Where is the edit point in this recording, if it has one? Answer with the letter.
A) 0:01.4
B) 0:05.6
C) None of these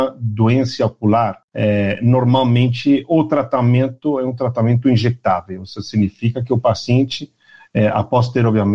A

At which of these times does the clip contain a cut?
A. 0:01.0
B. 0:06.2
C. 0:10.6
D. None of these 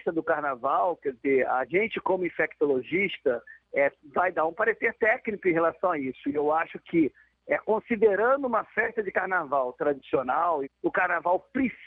C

